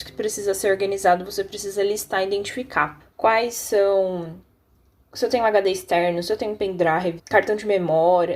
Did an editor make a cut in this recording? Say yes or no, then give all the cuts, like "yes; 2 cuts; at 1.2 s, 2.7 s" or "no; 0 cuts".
yes; 2 cuts; at 3.0 s, 7.2 s